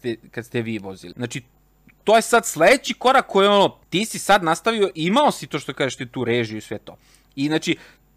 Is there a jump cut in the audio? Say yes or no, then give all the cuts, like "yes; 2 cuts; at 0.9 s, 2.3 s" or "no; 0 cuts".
yes; 2 cuts; at 1.1 s, 3.8 s